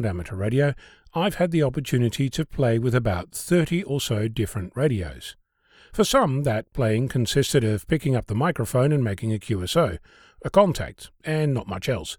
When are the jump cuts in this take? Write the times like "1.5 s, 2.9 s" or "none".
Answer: none